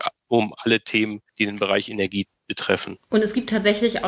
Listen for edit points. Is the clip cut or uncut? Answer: uncut